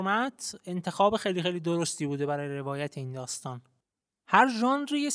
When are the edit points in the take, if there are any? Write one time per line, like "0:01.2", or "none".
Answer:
none

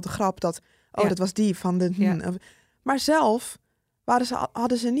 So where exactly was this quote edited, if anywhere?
none

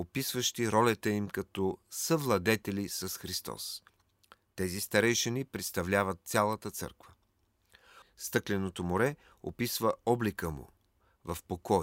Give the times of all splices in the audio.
0:08.0

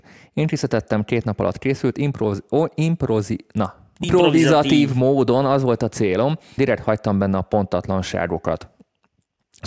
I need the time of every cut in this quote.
0:04.0
0:06.6

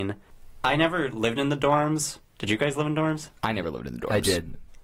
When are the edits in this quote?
0:03.4

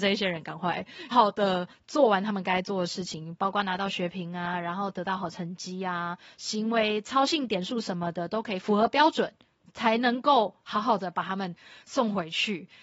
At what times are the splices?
0:01.1

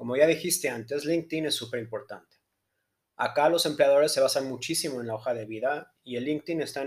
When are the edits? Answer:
none

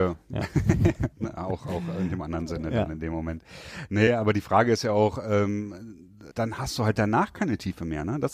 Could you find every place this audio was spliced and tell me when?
0:06.3

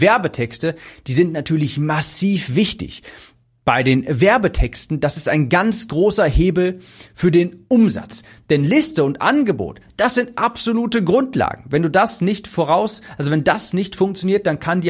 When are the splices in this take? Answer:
none

